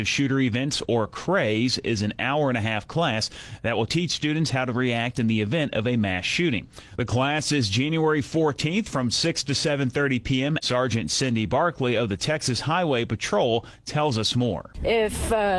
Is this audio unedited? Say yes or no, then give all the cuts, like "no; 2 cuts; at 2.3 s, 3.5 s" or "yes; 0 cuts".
no; 1 cut; at 10.6 s